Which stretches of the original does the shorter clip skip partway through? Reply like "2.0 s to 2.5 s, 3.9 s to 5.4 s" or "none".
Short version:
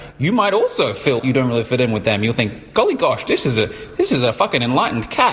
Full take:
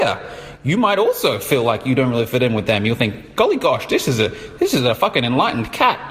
1.6 s to 1.8 s